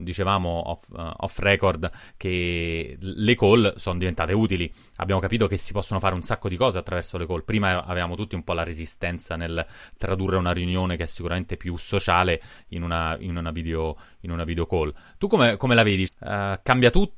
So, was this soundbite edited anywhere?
yes; 1 cut; at 16.1 s

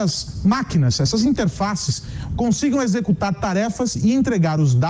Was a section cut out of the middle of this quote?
yes; 1 cut; at 2.3 s

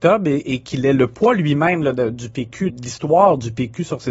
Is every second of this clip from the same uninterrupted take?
no; 1 cut; at 2.7 s

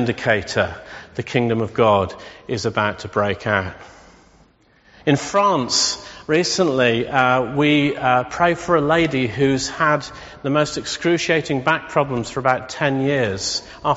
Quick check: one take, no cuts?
yes; 0 cuts

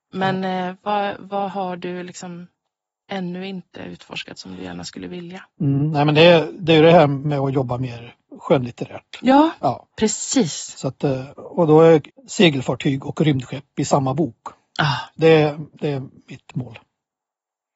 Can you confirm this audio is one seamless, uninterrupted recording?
no; 1 cut; at 12.1 s

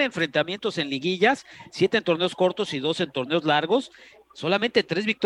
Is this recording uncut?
yes; 0 cuts

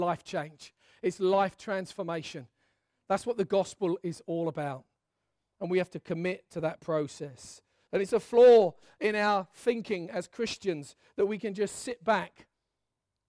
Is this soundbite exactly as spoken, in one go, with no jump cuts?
no; 1 cut; at 7.9 s

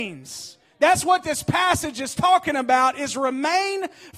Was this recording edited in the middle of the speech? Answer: no; 0 cuts

